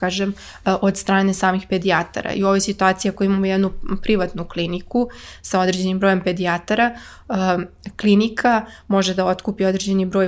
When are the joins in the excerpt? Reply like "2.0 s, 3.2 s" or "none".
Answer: none